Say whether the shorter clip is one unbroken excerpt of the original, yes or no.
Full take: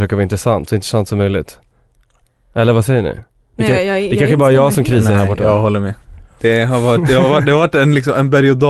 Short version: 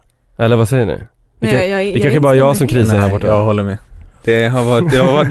yes